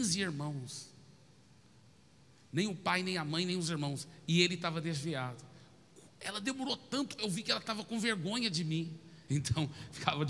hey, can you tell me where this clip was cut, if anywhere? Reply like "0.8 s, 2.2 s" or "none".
7.2 s, 9.3 s